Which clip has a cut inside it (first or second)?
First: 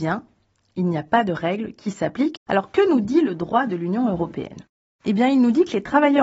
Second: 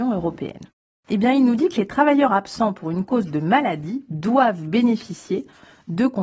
first